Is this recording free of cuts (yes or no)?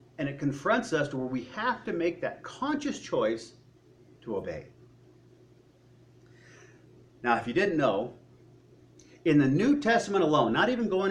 yes